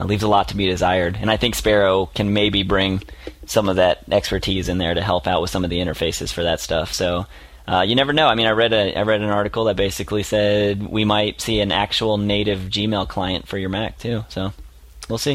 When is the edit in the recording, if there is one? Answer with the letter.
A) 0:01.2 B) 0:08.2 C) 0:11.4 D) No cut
C